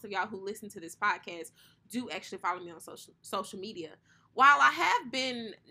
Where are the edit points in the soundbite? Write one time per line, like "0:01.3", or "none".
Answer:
none